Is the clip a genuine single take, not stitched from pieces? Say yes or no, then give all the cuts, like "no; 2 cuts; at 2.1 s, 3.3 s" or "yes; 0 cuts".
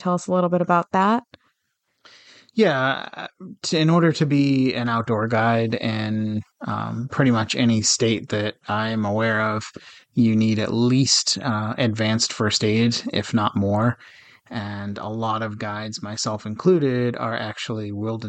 yes; 0 cuts